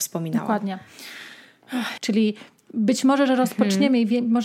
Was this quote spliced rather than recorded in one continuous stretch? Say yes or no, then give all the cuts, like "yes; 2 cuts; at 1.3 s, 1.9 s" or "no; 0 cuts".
yes; 1 cut; at 2.0 s